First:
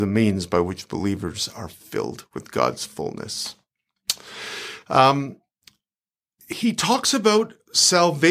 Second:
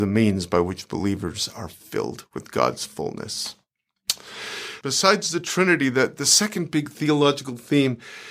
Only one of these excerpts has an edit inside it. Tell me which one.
second; 1 cut; at 4.8 s

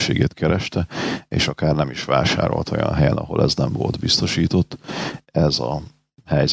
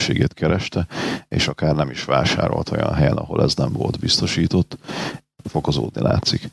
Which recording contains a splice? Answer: second; 1 cut; at 5.2 s

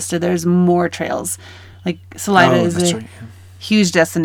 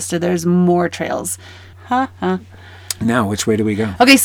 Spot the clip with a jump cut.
second; 1 cut; at 1.7 s

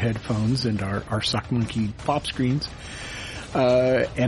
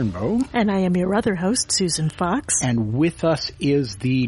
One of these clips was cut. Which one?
first; 1 cut; at 1.9 s

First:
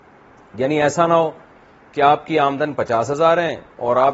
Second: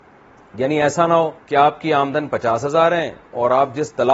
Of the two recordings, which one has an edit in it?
second; 1 cut; at 1.4 s

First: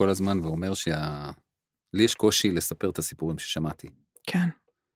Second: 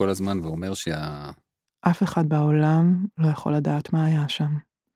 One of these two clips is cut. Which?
second; 1 cut; at 1.6 s

